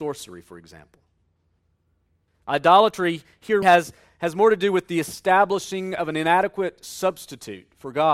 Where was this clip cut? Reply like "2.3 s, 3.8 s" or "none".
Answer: 2.3 s, 3.6 s